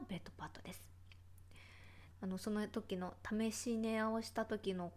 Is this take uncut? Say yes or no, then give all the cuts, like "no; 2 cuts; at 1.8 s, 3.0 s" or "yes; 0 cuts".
no; 1 cut; at 2.1 s